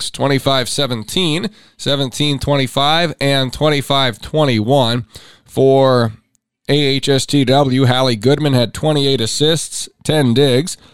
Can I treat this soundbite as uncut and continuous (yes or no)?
yes